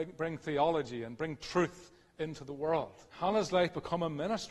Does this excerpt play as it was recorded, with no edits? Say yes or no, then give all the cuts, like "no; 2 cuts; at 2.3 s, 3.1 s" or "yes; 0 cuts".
no; 1 cut; at 3.1 s